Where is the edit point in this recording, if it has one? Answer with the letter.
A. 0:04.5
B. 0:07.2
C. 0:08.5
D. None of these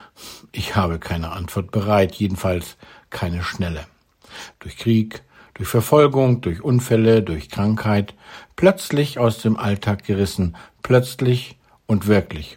A